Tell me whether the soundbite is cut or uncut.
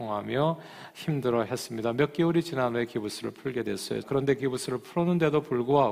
cut